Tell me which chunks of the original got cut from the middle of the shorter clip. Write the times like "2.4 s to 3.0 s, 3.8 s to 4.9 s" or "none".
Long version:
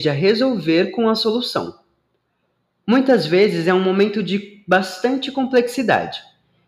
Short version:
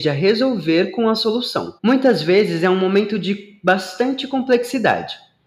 1.8 s to 2.8 s

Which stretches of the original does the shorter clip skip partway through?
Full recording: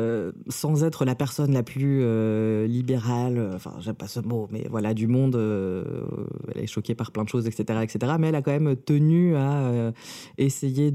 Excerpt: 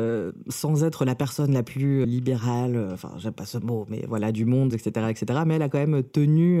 2.0 s to 2.7 s, 5.3 s to 7.4 s

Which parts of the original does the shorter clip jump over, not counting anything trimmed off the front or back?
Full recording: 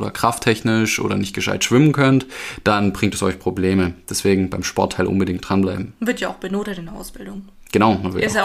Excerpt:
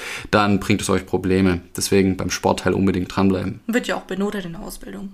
none

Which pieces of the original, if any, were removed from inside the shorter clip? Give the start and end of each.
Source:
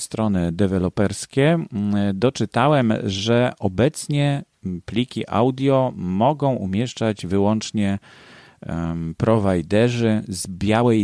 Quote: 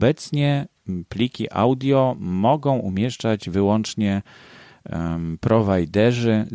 none

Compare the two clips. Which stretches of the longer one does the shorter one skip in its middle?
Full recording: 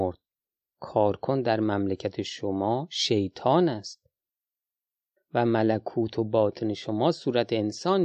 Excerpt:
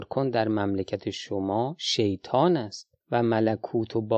4.1 s to 5.2 s

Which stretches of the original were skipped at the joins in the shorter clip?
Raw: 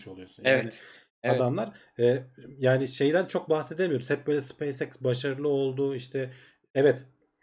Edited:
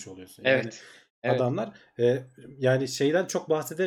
none

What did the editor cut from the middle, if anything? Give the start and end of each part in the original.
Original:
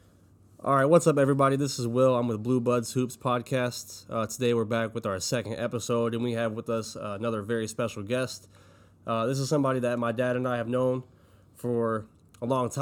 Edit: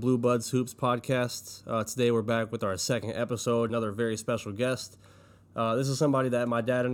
6.1 s to 7.2 s

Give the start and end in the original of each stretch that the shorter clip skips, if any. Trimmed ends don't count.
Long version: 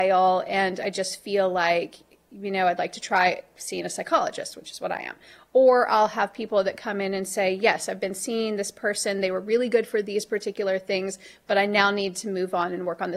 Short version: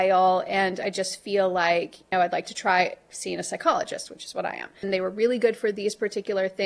2.1 s to 2.6 s, 5.3 s to 9.1 s

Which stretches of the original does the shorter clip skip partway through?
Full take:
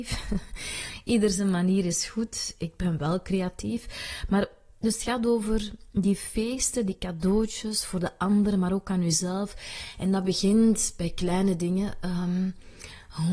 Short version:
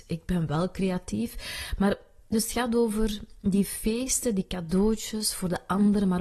none

